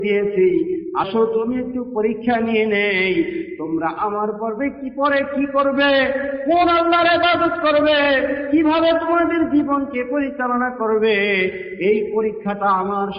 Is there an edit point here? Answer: yes; 1 cut; at 1.0 s

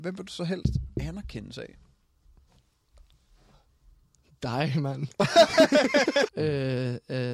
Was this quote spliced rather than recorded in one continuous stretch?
yes; 1 cut; at 6.3 s

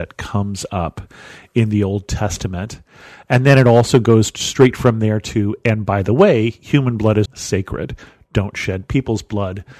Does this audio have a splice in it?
yes; 1 cut; at 7.2 s

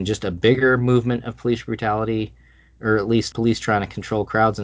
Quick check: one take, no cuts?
no; 1 cut; at 3.3 s

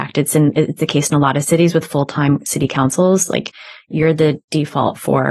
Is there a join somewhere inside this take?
no; 0 cuts

